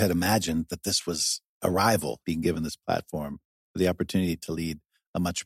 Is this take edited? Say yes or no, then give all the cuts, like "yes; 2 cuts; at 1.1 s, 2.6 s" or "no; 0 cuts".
yes; 1 cut; at 2.2 s